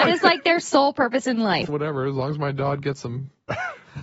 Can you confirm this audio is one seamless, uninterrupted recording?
no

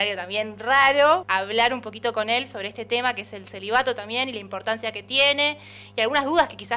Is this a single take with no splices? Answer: no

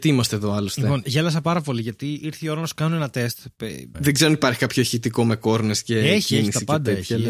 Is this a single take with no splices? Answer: no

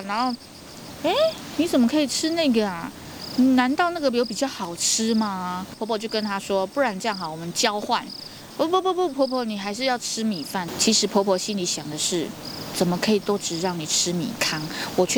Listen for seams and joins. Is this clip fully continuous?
yes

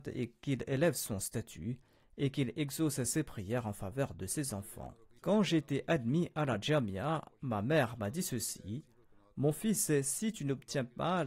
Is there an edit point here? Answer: yes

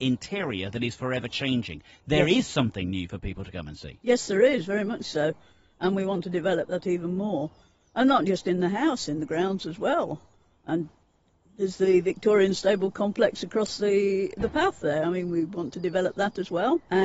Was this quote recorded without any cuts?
yes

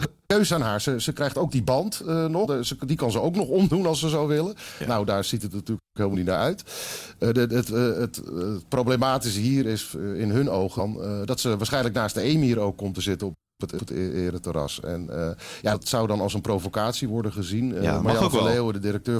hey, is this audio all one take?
yes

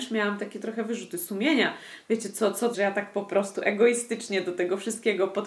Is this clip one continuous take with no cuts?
no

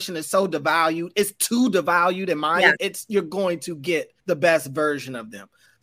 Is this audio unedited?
no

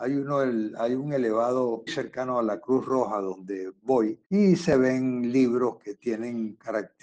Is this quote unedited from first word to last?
no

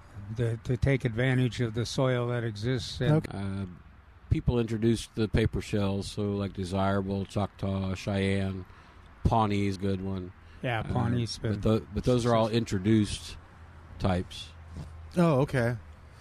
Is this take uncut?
no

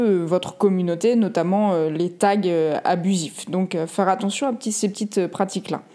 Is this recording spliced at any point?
no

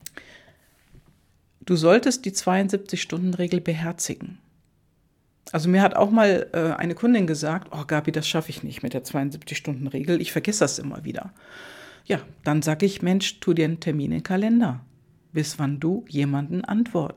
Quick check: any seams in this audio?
no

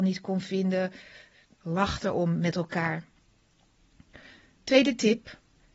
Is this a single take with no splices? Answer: no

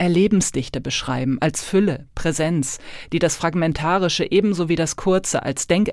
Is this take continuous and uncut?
yes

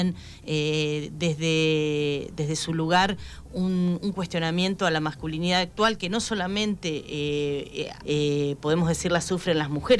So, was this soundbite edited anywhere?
yes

